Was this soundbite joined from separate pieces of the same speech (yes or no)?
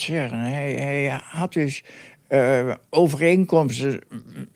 no